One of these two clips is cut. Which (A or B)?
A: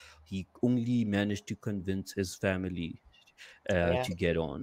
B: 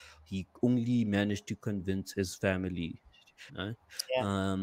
B